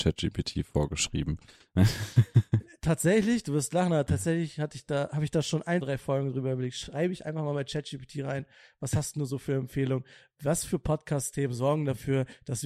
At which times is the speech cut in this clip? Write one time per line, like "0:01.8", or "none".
0:05.8